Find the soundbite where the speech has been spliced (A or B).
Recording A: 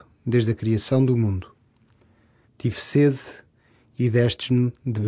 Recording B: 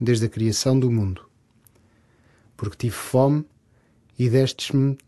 A